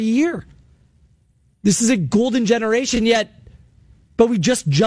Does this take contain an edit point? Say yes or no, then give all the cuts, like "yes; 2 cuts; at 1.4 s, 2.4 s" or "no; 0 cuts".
no; 0 cuts